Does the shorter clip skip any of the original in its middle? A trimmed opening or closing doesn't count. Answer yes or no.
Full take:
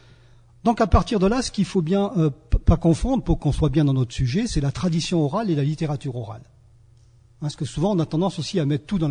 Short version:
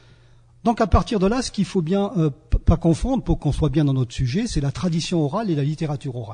no